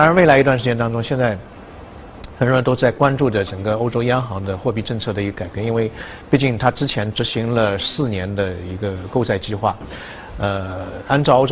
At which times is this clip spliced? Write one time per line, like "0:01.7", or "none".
none